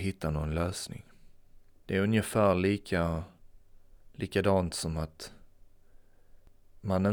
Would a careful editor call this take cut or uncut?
uncut